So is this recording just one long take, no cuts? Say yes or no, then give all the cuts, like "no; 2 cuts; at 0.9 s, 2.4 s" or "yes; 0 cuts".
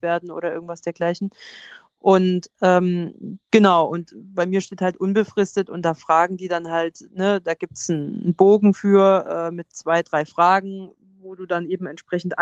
yes; 0 cuts